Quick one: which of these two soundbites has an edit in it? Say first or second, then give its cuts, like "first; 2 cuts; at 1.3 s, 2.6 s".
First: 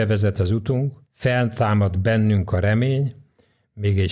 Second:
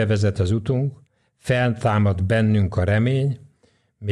first; 1 cut; at 1.1 s